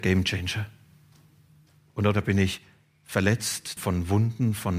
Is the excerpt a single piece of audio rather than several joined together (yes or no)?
no